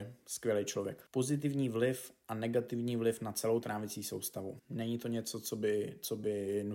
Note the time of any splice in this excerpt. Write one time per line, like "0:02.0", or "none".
0:01.1
0:04.6